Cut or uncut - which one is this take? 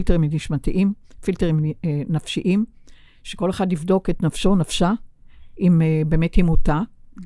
uncut